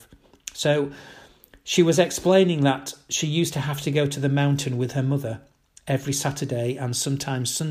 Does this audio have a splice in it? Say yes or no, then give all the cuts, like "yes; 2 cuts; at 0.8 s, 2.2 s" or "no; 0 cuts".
no; 0 cuts